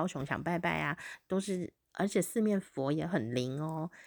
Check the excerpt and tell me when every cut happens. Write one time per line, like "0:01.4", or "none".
0:01.9